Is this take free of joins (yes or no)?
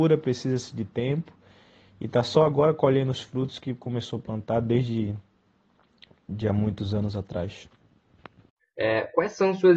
no